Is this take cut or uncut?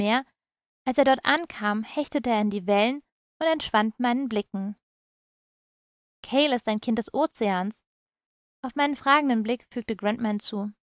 uncut